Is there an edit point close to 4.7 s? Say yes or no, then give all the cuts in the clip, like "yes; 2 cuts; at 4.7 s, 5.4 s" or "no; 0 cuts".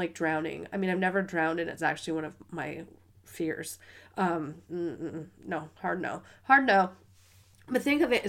yes; 1 cut; at 4.7 s